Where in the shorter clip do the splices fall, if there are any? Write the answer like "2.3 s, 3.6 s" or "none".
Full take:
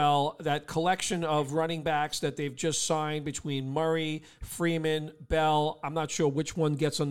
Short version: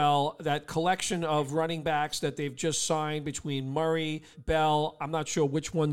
4.3 s